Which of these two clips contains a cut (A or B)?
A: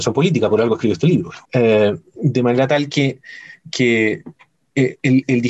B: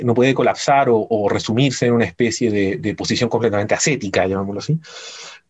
A